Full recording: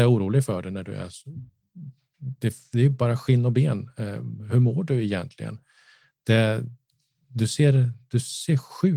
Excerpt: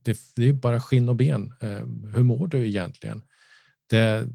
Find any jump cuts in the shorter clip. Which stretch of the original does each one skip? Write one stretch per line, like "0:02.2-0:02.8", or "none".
none